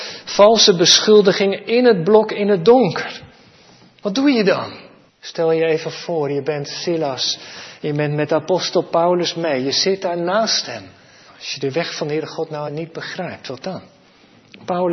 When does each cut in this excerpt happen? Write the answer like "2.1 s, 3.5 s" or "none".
5.1 s, 11.3 s, 12.7 s